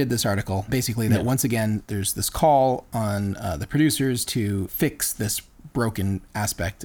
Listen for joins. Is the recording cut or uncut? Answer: uncut